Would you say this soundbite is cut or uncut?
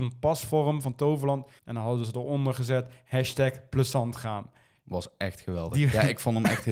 cut